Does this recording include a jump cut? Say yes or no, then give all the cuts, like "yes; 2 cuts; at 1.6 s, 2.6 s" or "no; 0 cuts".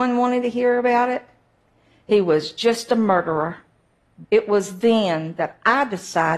yes; 1 cut; at 4.2 s